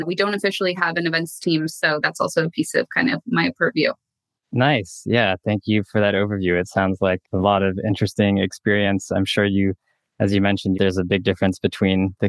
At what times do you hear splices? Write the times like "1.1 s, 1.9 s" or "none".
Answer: 1.7 s, 7.2 s, 10.7 s